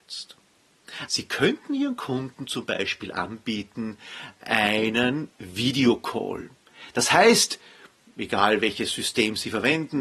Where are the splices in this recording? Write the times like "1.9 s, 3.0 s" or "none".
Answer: 1.1 s